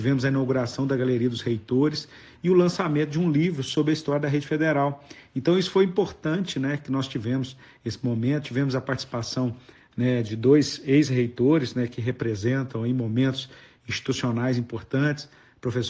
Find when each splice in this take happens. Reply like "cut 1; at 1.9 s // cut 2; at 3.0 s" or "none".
none